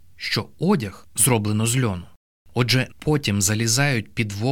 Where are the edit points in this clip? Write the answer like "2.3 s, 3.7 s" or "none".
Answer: 2.9 s